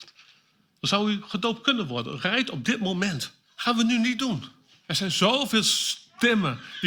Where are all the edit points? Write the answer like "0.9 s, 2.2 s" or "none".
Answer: 3.4 s, 4.8 s